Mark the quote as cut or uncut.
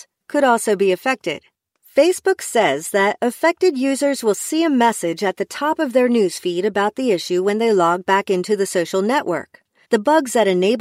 cut